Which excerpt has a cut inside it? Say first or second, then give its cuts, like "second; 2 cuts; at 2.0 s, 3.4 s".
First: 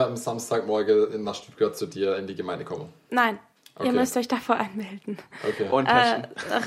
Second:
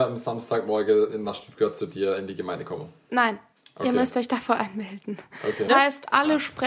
second; 1 cut; at 5.7 s